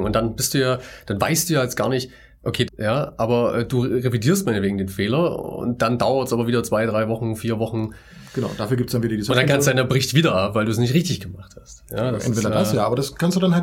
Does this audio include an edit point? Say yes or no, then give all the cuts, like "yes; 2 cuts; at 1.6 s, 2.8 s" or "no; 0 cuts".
yes; 1 cut; at 2.7 s